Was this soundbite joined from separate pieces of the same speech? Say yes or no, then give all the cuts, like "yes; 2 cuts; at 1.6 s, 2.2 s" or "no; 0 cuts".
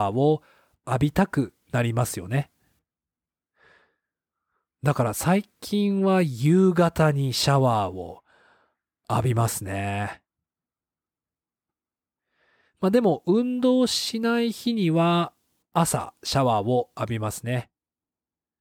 no; 0 cuts